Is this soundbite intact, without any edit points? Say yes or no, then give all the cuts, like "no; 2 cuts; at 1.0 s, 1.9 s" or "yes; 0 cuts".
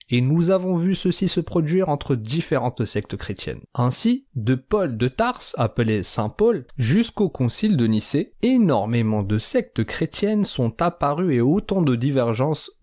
yes; 0 cuts